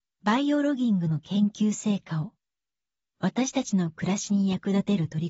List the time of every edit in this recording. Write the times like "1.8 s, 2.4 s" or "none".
none